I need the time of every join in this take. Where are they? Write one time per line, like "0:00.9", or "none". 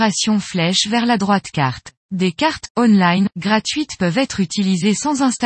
0:02.0

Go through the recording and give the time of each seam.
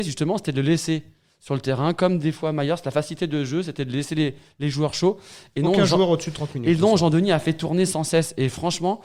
none

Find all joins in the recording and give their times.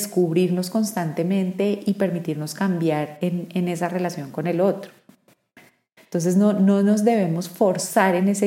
0:06.0

